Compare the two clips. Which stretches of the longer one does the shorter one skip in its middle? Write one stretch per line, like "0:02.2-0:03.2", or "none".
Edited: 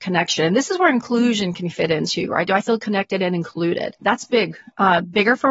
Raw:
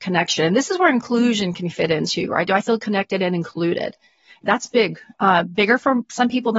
0:04.0-0:04.4